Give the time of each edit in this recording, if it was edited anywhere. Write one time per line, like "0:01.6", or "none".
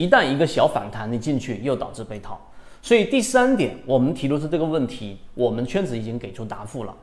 none

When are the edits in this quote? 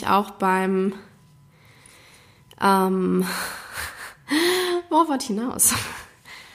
none

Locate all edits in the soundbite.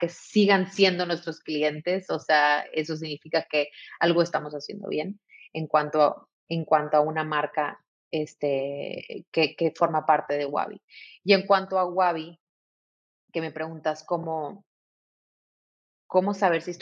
none

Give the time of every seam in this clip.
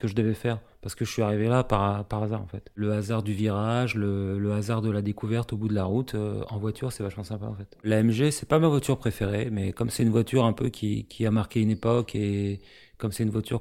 none

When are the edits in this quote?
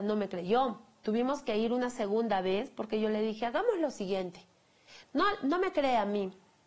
none

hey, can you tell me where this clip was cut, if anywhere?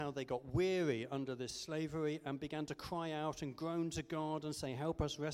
none

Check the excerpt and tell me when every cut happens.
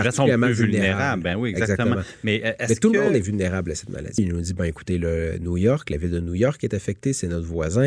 0:04.2

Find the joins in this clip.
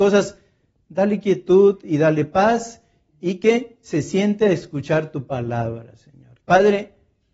0:06.4

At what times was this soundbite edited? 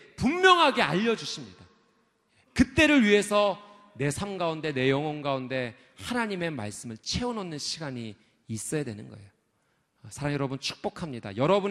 none

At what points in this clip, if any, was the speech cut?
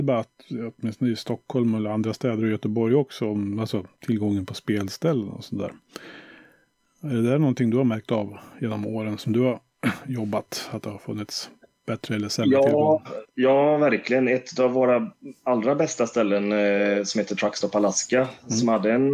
none

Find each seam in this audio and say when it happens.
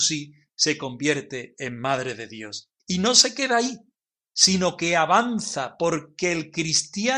0:02.8

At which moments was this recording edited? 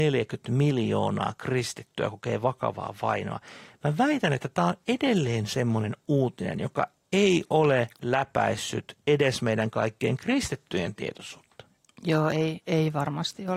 none

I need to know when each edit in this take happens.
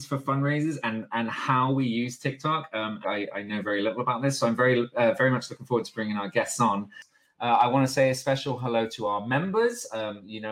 0:03.0

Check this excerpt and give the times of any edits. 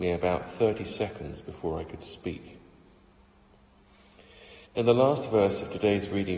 0:04.6

